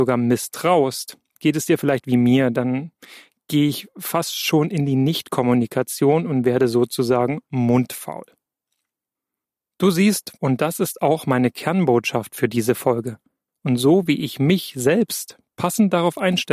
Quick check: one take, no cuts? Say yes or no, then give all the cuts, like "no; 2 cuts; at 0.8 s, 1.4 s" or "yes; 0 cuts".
no; 2 cuts; at 10.4 s, 13.5 s